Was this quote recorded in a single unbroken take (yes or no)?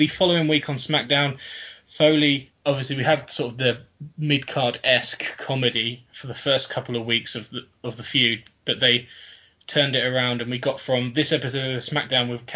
no